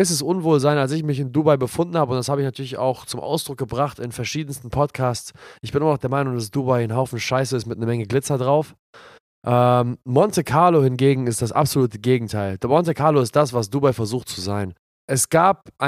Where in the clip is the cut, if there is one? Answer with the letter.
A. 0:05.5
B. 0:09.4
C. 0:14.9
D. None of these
C